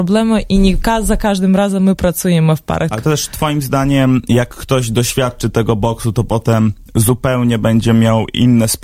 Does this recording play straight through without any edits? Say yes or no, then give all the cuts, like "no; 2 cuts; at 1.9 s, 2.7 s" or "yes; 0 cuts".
no; 1 cut; at 2.9 s